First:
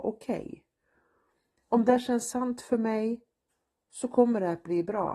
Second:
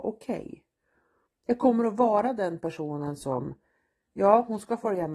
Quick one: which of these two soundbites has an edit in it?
second; 1 cut; at 1.3 s

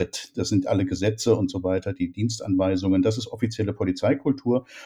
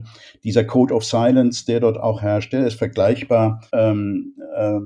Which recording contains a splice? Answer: second; 1 cut; at 3.7 s

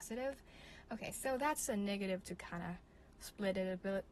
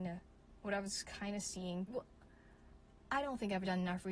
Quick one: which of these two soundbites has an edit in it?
second; 1 cut; at 1.9 s

